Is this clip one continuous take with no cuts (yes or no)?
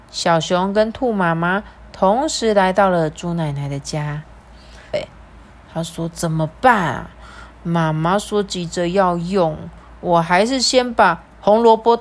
no